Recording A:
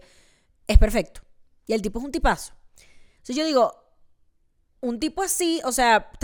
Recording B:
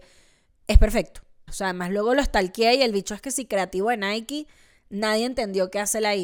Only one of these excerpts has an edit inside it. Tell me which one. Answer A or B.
B